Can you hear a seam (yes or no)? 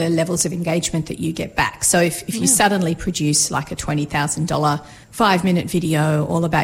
yes